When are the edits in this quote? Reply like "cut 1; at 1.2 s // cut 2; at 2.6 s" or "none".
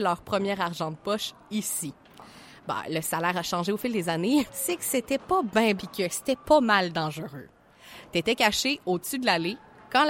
cut 1; at 4.5 s // cut 2; at 5.8 s